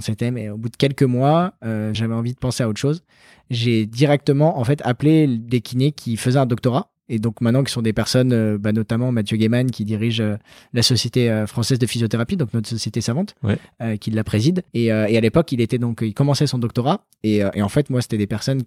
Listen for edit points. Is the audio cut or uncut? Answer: cut